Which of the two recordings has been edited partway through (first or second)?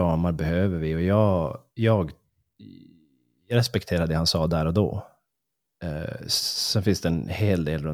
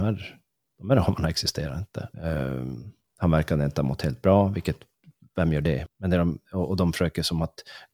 second